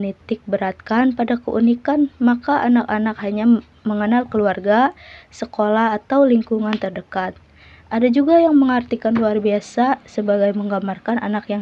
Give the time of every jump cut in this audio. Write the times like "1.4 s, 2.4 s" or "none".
none